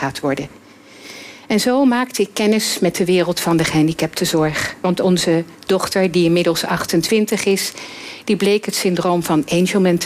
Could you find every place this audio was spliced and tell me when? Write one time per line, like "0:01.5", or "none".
none